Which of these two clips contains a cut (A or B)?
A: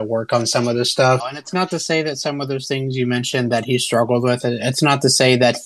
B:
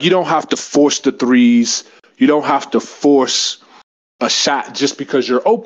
A